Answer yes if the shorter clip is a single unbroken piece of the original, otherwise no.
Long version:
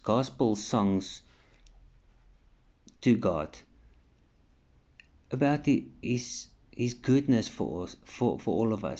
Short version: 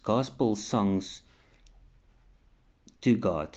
yes